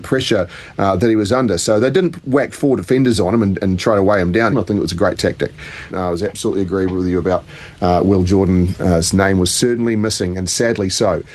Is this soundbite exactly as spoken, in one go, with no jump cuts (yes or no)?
no